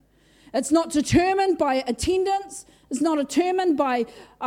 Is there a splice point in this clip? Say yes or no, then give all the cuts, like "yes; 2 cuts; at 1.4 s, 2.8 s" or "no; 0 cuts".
no; 0 cuts